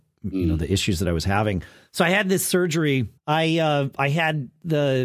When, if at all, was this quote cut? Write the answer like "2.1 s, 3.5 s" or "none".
3.2 s